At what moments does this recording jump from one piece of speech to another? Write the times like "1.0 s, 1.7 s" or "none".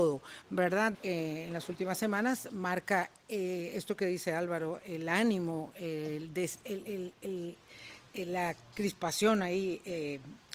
0.9 s

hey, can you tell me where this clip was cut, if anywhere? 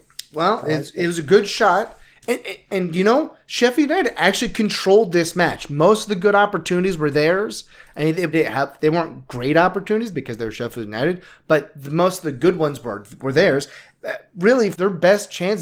8.3 s, 14.7 s

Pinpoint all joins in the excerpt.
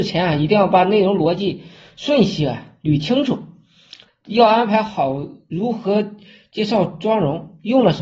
4.1 s

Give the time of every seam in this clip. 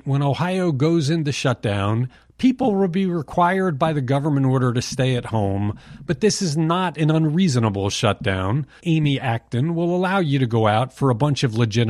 8.8 s

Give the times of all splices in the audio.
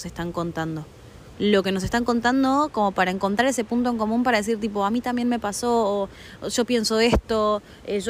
1.3 s

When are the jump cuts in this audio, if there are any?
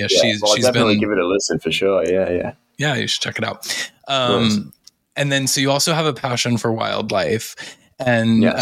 none

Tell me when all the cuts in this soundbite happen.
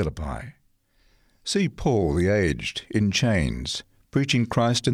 none

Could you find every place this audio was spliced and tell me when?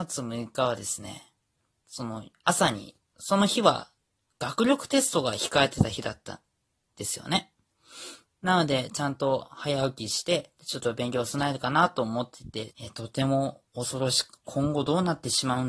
10.6 s, 12.7 s, 14.4 s

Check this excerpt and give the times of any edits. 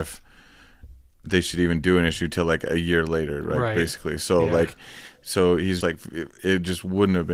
5.8 s

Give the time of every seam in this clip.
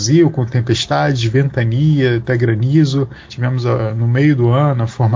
3.3 s

